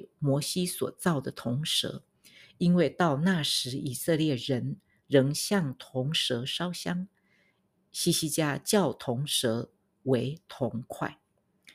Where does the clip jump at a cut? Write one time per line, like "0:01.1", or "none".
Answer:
none

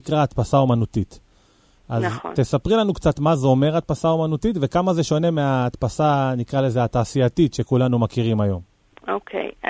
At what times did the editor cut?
none

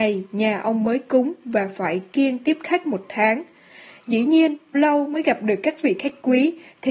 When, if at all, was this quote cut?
0:04.7

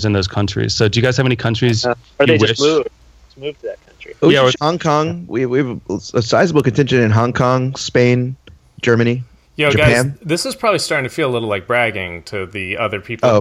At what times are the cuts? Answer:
0:04.5

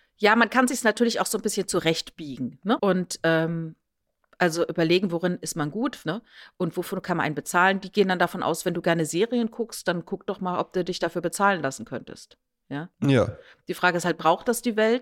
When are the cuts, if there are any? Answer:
0:02.8
0:06.0

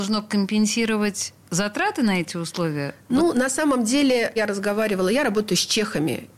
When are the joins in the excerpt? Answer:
none

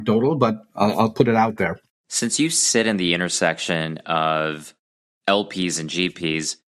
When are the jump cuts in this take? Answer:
0:01.9

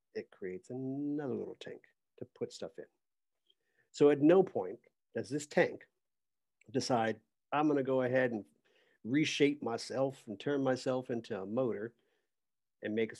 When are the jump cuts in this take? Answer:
0:07.3

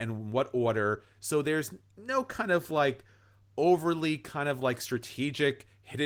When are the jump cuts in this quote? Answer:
none

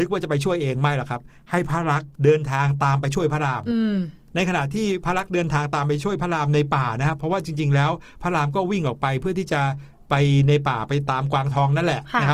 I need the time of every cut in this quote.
0:02.1

